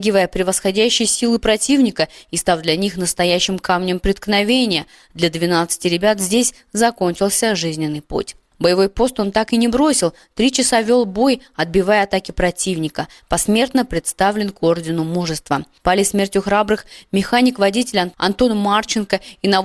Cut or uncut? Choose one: cut